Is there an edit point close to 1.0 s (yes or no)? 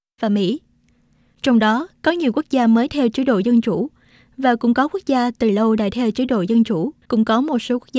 no